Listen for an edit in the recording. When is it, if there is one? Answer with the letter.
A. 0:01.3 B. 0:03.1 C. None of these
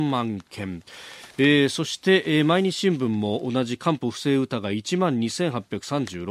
C